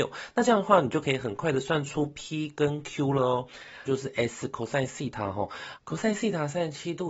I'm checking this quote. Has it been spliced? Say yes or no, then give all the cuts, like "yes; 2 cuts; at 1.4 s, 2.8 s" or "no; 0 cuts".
yes; 1 cut; at 3.9 s